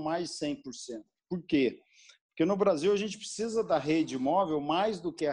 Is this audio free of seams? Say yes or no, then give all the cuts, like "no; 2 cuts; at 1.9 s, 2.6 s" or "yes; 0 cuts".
yes; 0 cuts